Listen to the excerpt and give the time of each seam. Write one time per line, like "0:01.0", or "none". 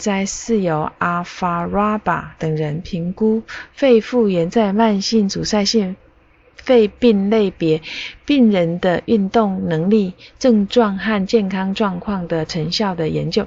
none